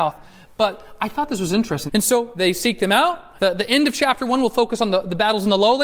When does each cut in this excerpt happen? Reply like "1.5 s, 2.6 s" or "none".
1.9 s, 3.4 s